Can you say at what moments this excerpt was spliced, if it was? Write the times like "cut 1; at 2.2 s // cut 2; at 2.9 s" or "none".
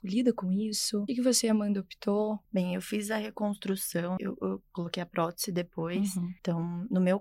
cut 1; at 1.1 s // cut 2; at 4.2 s